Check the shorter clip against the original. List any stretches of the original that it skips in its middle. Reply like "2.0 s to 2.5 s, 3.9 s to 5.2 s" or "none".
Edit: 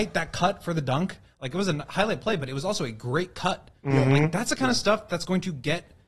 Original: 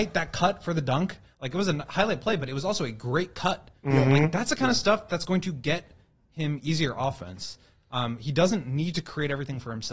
none